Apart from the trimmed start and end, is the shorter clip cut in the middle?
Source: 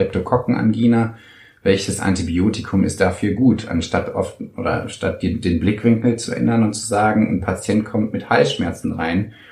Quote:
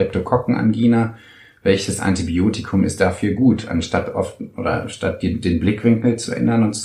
no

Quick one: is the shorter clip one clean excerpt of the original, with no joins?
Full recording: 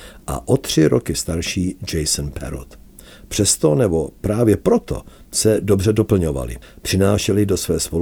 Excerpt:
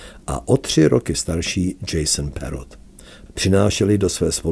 no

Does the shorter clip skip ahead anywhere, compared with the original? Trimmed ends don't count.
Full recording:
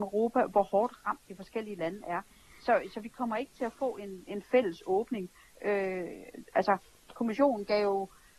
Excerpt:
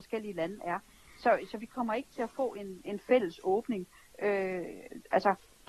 no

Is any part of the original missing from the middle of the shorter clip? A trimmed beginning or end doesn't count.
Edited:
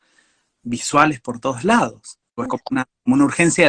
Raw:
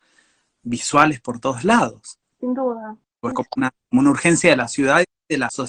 yes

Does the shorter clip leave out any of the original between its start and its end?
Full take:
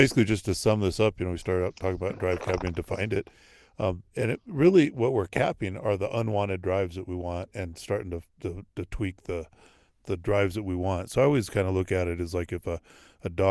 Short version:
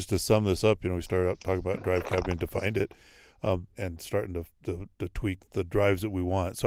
yes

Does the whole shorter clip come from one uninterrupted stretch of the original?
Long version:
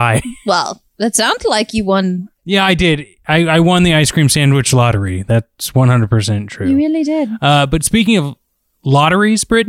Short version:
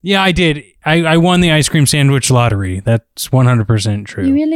yes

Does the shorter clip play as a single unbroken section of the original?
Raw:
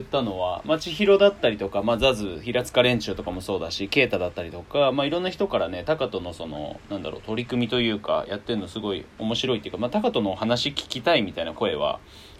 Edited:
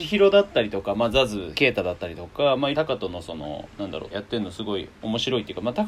no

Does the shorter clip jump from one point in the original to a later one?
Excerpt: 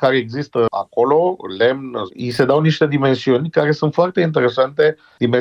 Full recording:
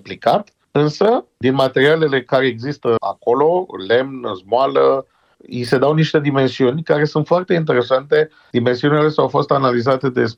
yes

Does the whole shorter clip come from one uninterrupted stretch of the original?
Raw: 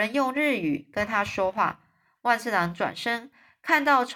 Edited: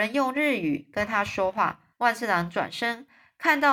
no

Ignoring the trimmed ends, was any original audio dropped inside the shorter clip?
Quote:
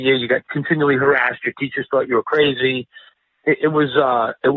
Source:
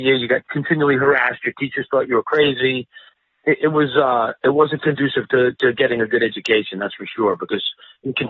no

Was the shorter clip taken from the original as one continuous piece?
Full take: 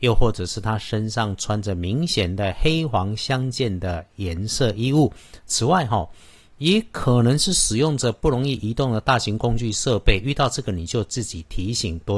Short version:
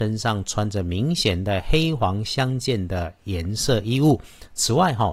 yes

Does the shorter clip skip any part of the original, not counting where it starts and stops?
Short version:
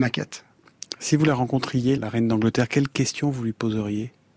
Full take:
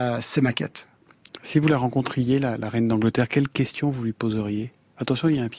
yes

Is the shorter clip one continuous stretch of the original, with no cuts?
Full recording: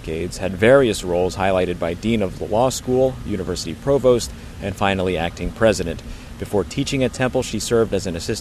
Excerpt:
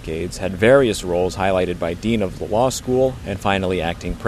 no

